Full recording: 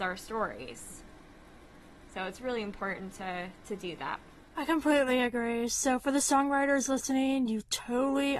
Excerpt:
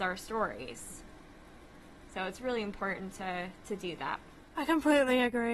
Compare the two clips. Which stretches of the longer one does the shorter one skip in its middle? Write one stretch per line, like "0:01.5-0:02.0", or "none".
none